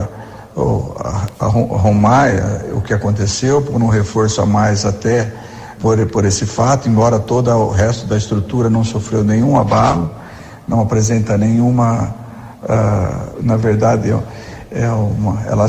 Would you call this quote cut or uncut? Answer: cut